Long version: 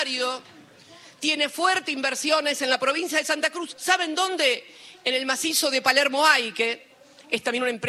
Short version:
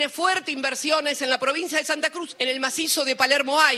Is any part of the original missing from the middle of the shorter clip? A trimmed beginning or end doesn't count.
yes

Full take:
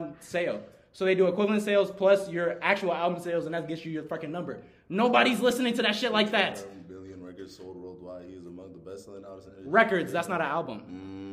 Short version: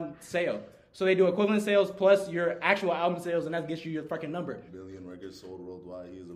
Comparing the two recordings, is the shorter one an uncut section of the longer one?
no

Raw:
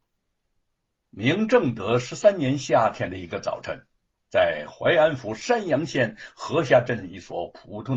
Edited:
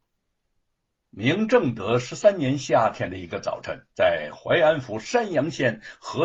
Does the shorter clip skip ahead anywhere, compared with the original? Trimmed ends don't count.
yes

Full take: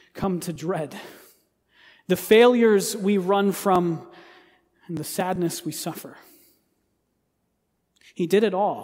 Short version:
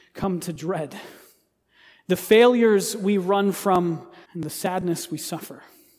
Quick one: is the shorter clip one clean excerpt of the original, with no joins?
no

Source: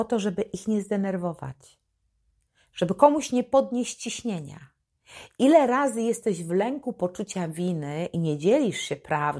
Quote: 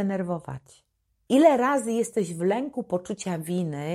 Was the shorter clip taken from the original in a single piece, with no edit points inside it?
no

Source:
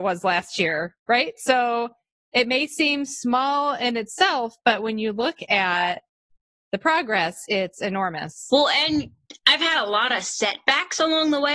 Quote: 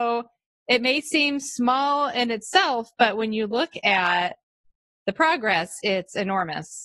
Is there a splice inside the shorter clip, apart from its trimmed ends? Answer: no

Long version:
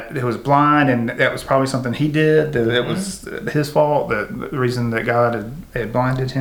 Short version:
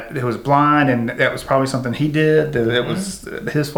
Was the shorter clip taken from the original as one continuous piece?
yes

